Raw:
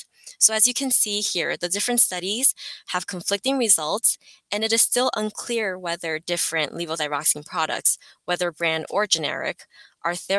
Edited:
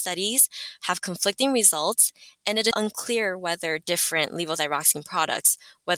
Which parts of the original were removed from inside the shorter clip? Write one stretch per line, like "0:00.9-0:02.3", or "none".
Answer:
0:04.8-0:05.1

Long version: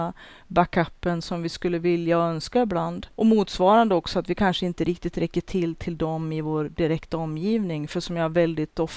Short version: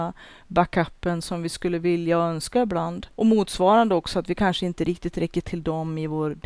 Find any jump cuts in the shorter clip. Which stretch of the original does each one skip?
0:05.4-0:05.8

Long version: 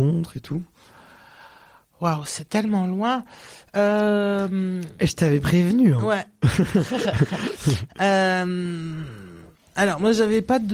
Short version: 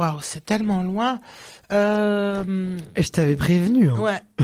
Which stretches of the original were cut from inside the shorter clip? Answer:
none

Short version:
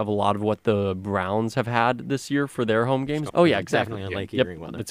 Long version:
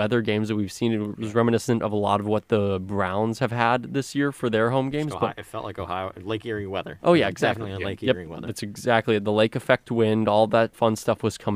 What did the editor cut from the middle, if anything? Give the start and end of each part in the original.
0:05.1-0:07.0

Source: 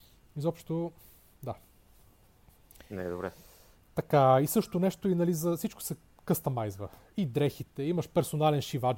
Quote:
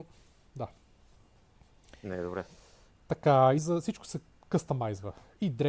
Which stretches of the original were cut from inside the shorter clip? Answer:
0:04.4-0:05.3

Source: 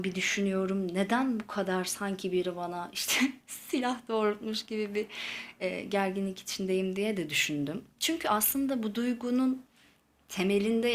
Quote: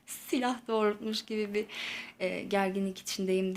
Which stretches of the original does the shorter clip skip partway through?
none

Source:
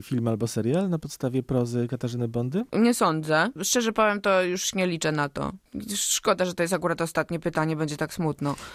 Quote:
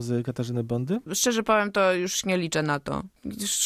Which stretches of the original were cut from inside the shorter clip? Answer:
0:02.7-0:03.5

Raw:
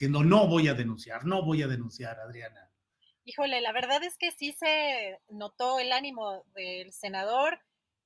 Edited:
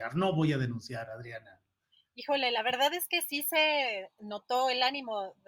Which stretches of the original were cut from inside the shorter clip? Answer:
none

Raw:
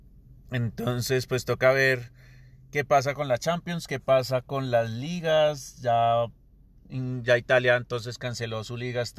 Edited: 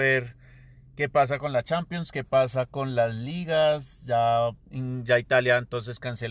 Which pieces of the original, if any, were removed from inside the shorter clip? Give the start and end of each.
0:06.4-0:06.8

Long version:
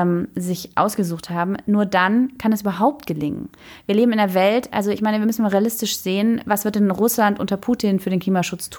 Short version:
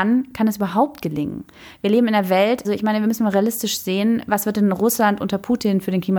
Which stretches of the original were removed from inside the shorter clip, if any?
0:04.7-0:04.8

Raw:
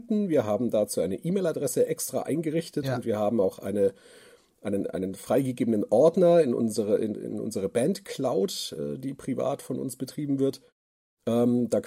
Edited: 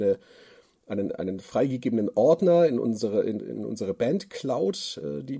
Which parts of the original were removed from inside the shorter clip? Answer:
none

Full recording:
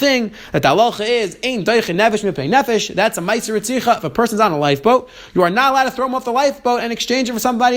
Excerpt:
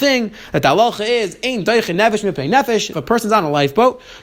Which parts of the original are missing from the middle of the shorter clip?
0:02.9-0:04.0

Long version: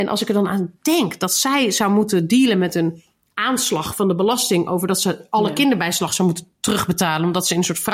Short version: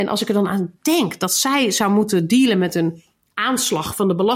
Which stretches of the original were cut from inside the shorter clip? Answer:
none

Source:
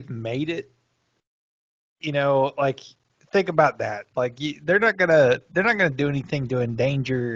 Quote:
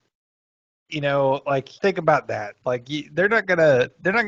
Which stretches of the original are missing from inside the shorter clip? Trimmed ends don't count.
0:02.9-0:03.3

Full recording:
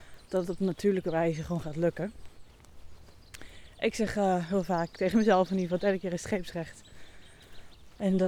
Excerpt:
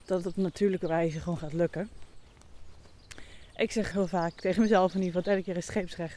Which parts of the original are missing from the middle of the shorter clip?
0:04.1-0:04.5

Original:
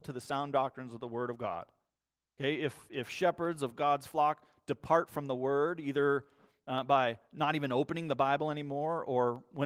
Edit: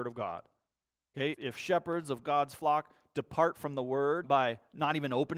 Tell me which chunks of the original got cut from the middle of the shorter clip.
0:02.6-0:02.8
0:05.8-0:06.8

